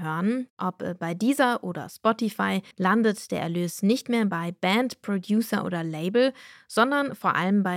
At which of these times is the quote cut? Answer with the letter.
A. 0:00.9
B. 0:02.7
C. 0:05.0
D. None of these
B